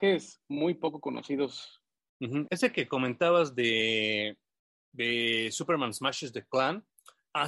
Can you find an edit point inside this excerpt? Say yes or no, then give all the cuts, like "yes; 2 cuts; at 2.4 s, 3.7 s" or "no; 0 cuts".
yes; 1 cut; at 2.5 s